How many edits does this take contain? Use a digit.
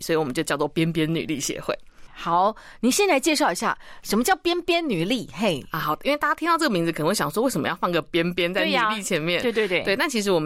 1